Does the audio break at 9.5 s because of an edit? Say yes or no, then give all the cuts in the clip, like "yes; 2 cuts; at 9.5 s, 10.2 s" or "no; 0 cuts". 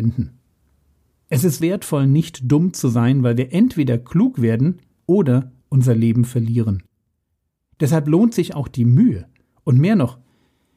no; 1 cut; at 1.6 s